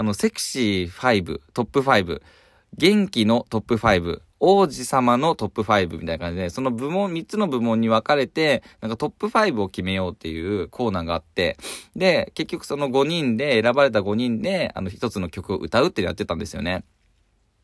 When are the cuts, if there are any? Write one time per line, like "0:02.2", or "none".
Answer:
none